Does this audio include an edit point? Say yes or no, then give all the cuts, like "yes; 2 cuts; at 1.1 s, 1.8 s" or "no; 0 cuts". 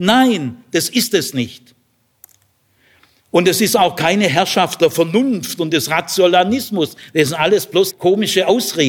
yes; 1 cut; at 7.9 s